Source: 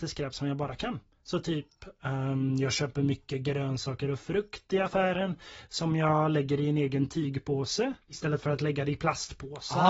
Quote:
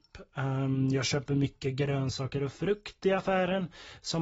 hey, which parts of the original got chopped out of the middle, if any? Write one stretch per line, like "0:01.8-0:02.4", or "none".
none